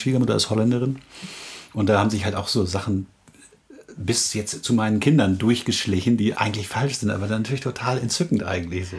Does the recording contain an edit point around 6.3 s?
yes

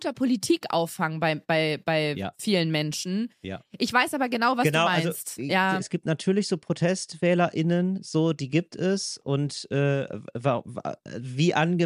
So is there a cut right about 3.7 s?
no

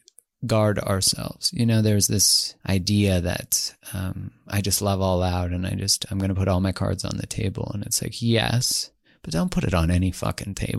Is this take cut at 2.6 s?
yes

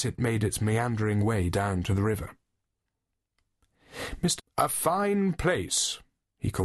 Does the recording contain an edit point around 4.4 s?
yes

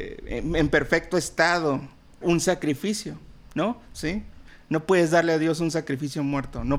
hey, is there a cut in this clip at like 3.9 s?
yes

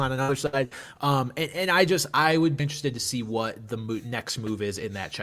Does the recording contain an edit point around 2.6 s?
yes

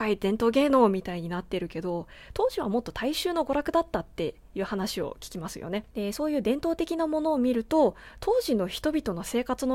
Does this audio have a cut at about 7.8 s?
no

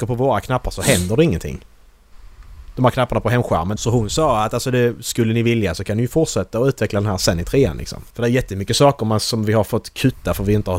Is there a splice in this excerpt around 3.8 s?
yes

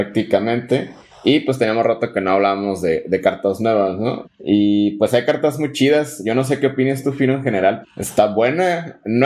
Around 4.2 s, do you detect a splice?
yes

